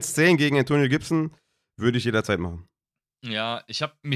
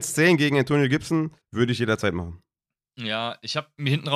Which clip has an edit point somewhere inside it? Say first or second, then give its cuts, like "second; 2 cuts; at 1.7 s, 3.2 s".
second; 1 cut; at 1.4 s